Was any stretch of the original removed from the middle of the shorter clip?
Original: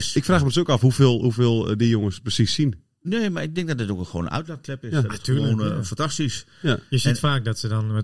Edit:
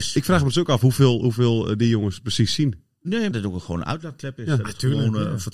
yes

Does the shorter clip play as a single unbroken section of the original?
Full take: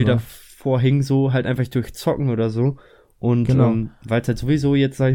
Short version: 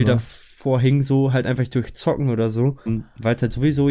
no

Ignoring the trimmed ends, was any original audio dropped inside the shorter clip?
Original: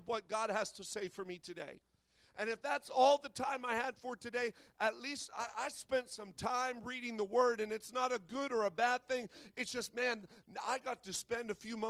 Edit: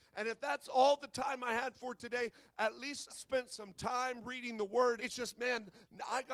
yes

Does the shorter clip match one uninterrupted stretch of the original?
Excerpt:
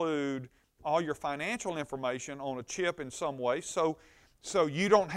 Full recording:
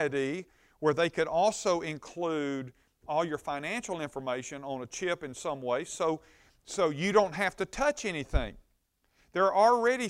yes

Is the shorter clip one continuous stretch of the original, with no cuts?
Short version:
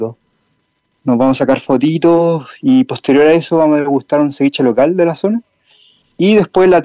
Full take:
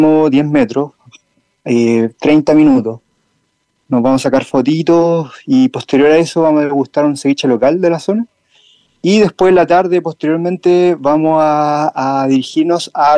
yes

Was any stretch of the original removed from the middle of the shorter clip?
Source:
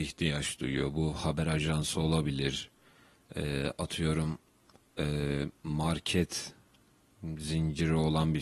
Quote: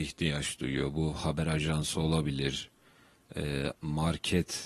yes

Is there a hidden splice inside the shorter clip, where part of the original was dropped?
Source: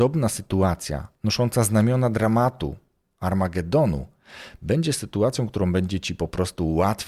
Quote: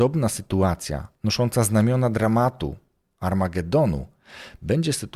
no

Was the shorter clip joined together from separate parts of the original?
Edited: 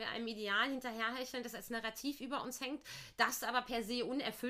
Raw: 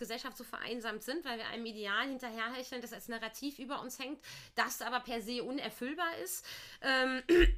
no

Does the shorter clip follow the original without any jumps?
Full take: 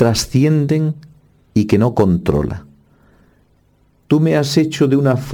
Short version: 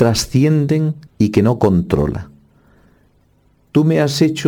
no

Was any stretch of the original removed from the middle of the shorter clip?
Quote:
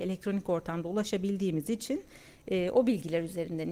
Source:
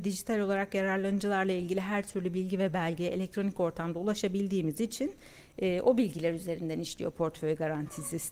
no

